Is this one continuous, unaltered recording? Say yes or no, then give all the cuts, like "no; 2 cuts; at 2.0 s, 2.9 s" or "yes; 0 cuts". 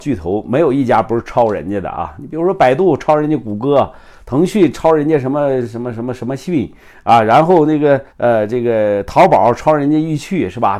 no; 1 cut; at 8.1 s